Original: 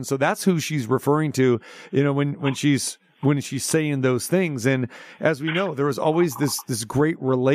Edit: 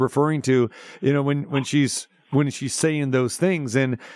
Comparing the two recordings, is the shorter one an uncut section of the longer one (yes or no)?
yes